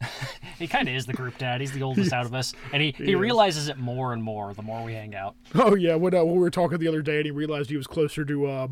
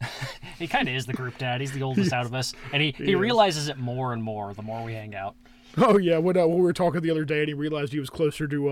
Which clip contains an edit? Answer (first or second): first